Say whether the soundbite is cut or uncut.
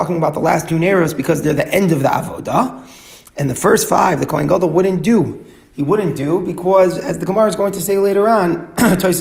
uncut